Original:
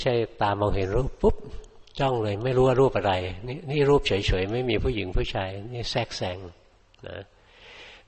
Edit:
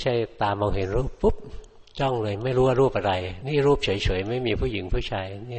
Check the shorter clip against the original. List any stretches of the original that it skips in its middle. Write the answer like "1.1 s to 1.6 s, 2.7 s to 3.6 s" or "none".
3.4 s to 3.6 s